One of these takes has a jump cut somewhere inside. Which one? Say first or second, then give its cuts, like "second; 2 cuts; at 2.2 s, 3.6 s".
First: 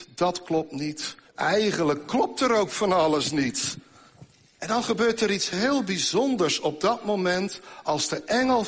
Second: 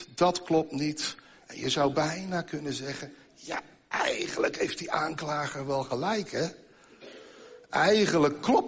first; 2 cuts; at 1.3 s, 4.6 s